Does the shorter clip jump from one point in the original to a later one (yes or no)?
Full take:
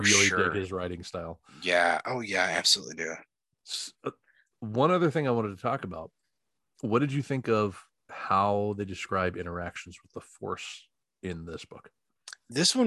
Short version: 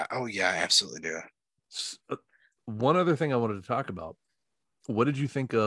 no